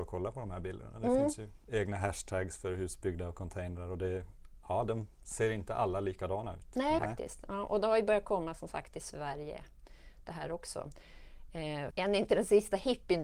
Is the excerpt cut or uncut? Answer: cut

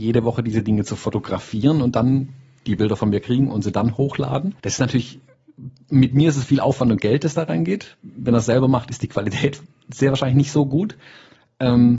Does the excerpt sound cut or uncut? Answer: cut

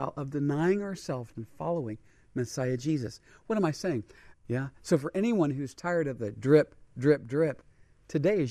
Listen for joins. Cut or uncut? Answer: cut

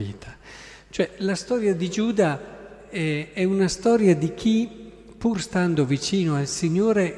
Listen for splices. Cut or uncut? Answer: uncut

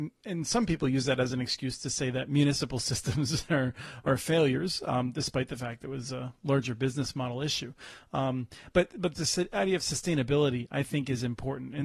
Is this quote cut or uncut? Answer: uncut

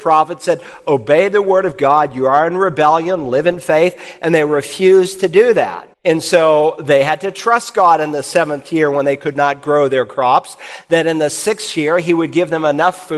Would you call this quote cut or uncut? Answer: cut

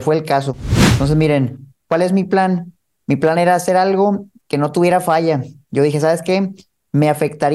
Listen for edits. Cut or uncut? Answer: uncut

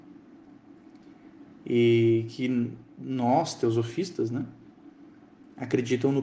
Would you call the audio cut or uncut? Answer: uncut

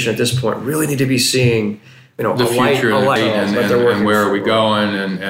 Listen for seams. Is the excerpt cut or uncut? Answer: cut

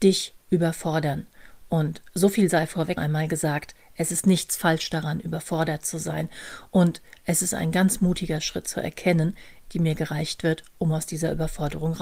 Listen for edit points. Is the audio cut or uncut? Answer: cut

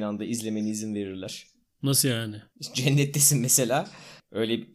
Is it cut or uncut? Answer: uncut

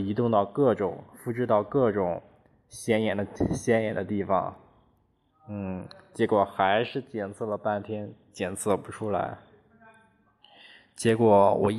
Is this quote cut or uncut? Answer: uncut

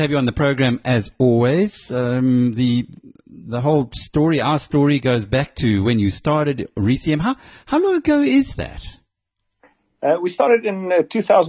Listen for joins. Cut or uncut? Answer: uncut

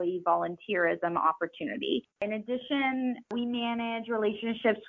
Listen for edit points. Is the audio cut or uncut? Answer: cut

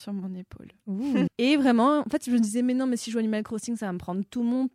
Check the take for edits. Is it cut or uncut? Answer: cut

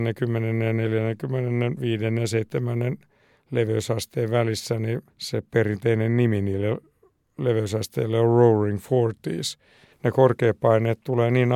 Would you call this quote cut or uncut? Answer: cut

